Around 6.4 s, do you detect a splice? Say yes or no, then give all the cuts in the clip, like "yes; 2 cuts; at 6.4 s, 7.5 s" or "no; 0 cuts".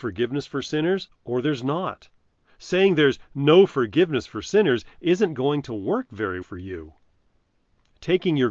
yes; 1 cut; at 6.4 s